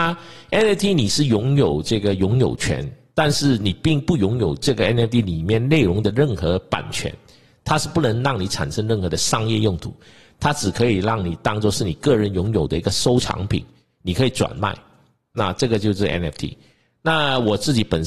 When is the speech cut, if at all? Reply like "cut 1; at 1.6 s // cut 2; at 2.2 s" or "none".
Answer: none